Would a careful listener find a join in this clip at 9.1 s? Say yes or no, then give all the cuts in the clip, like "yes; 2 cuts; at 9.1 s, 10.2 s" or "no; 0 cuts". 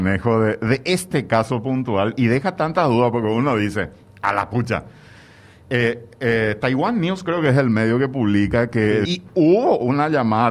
yes; 1 cut; at 9.1 s